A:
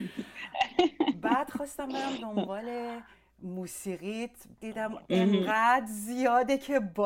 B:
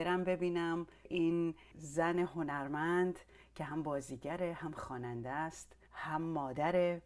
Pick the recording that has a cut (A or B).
B